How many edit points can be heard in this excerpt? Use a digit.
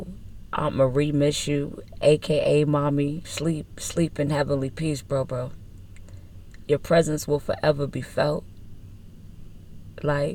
2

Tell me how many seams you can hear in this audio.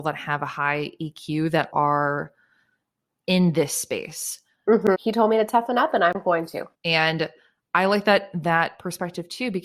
3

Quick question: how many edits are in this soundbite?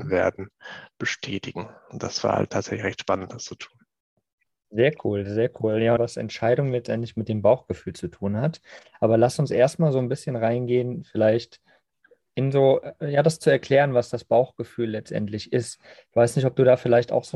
1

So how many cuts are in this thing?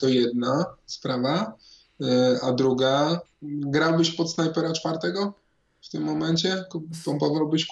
1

